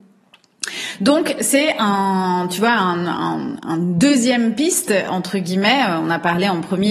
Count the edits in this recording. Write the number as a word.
zero